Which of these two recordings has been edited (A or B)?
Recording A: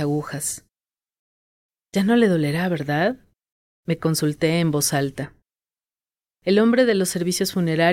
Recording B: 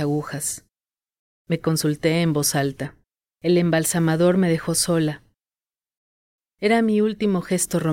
B